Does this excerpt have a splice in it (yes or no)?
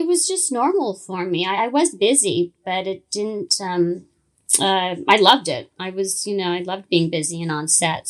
no